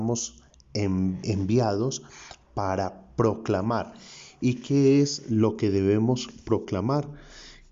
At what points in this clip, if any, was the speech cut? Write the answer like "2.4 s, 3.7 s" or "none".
1.2 s